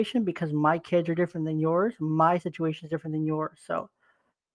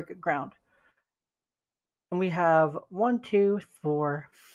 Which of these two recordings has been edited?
second; 1 cut; at 3.6 s

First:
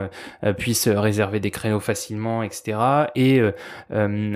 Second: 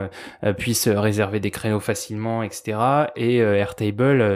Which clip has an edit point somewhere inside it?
second; 1 cut; at 3.1 s

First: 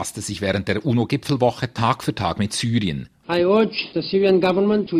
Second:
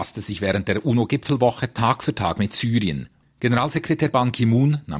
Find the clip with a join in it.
first; 1 cut; at 3.2 s

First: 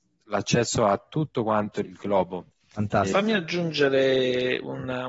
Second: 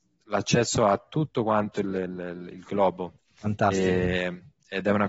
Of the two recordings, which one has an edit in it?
first; 2 cuts; at 1.8 s, 3.1 s

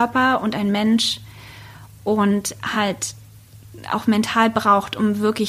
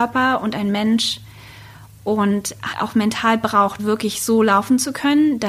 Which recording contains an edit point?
second; 2 cuts; at 2.7 s, 3.8 s

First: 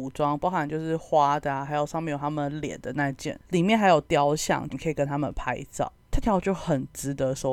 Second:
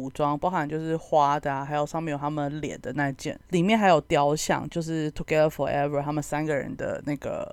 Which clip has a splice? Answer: first; 2 cuts; at 4.7 s, 6.2 s

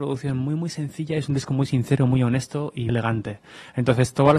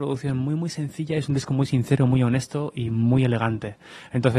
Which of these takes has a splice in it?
first; 1 cut; at 2.9 s

